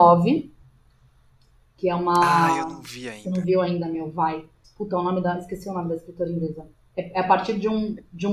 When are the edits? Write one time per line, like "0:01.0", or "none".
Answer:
0:04.6